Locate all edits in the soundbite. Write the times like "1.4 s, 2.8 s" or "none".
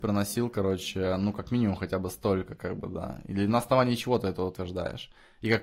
none